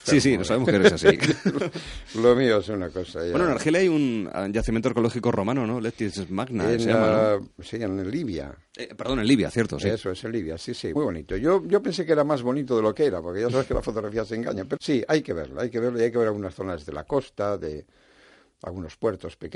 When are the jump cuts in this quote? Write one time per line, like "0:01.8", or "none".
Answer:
0:11.0
0:14.8